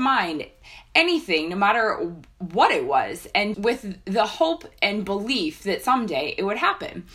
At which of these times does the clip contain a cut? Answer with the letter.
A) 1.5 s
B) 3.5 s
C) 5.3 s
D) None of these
B